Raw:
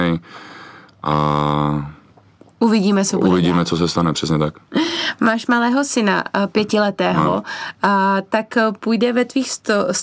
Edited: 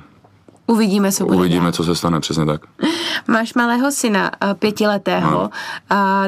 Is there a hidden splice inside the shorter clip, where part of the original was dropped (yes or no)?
no